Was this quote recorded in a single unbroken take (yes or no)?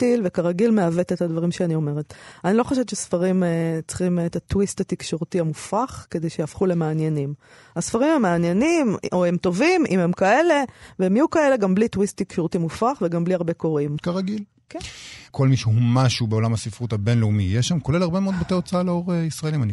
no